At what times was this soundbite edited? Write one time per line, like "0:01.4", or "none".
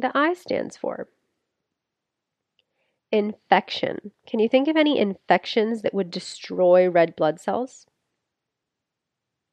0:04.2